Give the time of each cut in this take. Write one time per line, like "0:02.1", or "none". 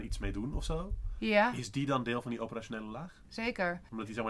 0:03.3